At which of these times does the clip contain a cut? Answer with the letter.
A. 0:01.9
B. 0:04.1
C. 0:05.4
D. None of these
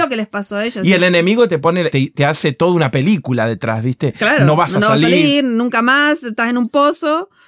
A